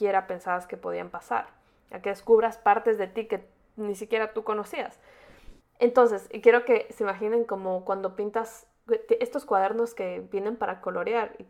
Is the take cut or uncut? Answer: cut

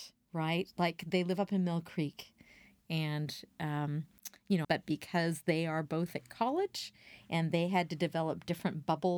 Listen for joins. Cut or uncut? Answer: cut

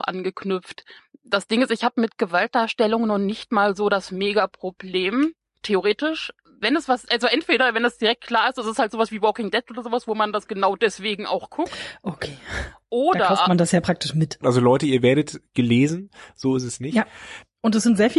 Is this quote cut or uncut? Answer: cut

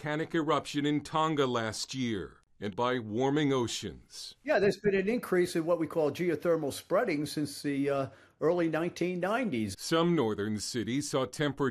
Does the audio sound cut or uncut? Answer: cut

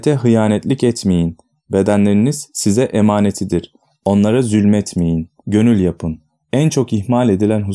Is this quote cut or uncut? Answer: cut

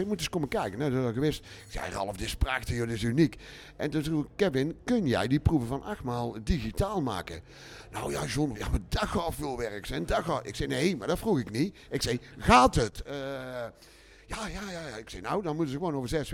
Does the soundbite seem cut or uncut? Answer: cut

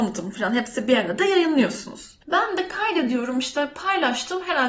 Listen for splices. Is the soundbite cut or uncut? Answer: cut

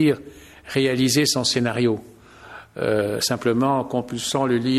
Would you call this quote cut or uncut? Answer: uncut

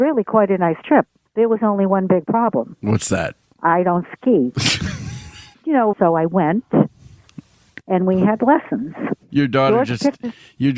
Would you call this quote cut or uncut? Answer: cut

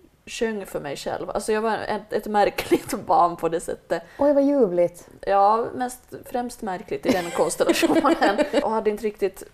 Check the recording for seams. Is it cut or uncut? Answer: cut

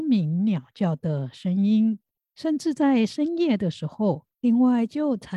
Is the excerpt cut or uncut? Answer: cut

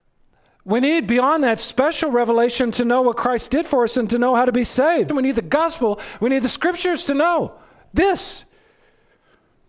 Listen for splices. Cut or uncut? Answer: cut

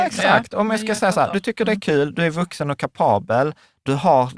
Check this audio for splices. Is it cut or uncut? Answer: uncut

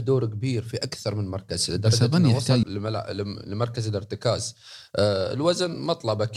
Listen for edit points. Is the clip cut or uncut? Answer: cut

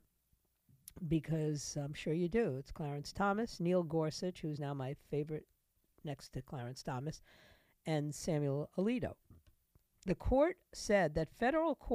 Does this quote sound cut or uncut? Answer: uncut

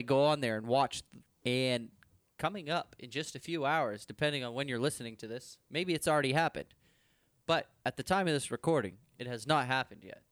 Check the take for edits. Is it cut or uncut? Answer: cut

